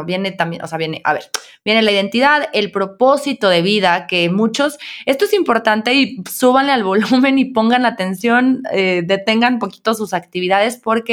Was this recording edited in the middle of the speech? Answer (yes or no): no